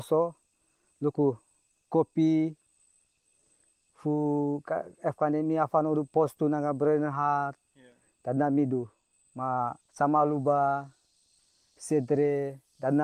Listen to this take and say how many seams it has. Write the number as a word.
one